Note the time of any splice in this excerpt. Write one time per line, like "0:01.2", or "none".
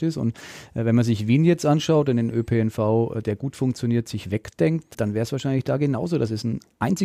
0:04.9